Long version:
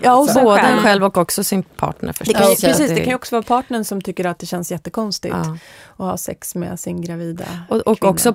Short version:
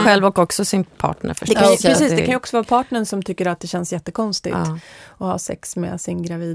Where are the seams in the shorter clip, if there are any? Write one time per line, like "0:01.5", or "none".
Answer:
none